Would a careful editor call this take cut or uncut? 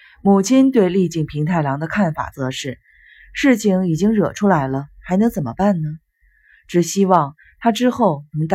uncut